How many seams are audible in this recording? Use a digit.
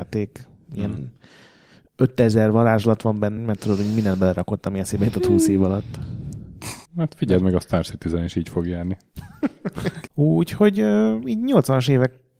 3